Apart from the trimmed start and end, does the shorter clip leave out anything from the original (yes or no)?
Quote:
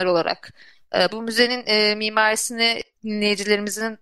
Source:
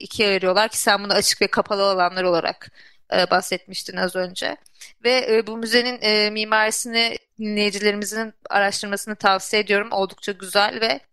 yes